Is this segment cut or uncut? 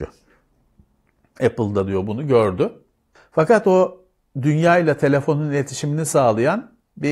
cut